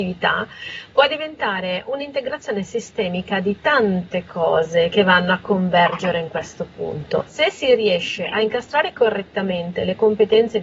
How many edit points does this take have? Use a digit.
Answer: 1